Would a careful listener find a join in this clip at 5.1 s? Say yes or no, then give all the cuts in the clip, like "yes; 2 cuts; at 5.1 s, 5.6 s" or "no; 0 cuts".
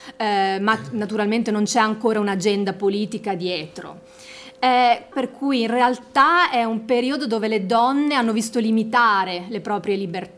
yes; 1 cut; at 5.1 s